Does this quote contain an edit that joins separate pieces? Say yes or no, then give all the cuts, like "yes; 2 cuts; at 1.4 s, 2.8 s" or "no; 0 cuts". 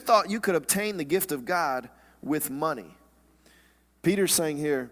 no; 0 cuts